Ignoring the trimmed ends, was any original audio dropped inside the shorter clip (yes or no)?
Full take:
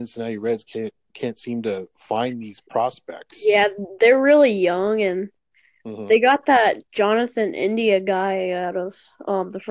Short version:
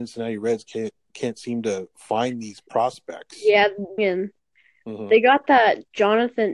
yes